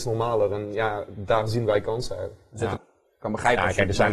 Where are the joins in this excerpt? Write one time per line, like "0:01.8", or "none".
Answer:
0:02.8